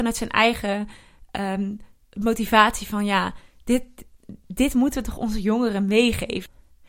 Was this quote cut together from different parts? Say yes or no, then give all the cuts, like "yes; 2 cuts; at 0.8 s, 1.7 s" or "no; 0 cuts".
no; 0 cuts